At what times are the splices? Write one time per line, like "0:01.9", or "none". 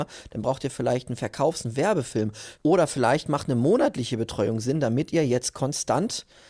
0:02.6